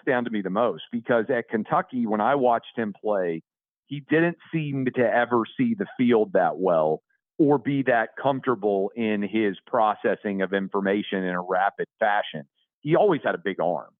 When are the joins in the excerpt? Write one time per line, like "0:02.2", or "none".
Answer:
none